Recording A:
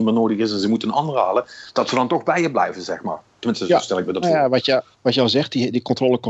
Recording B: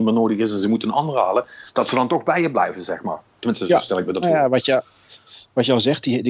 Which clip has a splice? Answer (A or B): A